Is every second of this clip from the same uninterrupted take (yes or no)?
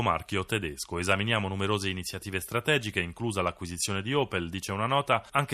yes